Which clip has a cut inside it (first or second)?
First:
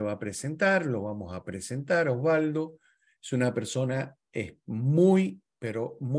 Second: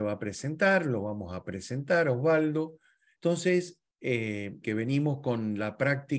second